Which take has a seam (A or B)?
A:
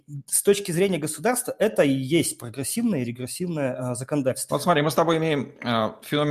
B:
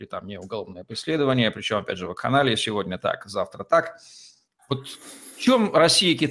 A